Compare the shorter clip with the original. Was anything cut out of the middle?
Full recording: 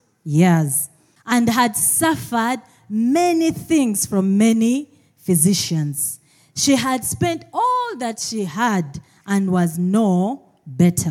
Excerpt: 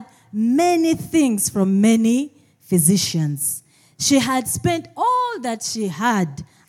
no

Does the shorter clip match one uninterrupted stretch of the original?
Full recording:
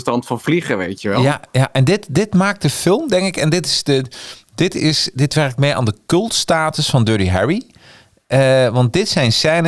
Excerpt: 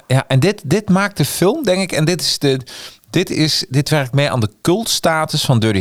yes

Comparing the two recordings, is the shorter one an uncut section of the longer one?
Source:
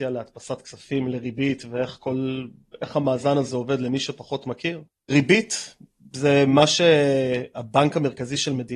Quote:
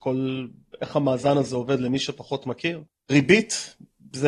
yes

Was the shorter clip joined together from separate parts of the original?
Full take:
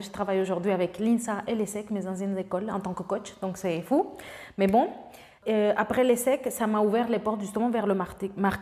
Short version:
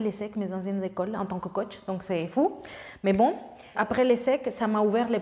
yes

